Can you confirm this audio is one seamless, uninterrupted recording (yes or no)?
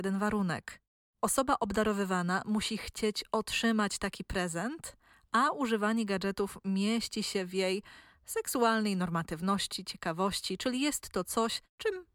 yes